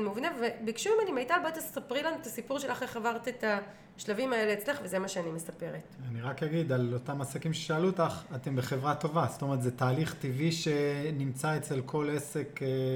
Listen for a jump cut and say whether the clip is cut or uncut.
uncut